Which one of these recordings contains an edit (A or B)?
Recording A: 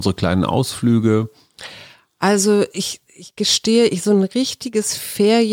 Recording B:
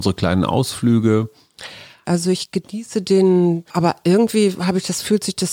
B